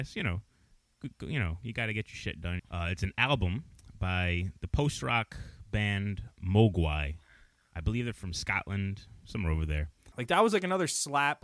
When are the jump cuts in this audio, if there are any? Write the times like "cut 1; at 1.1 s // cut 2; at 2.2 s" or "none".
cut 1; at 2.6 s // cut 2; at 10.1 s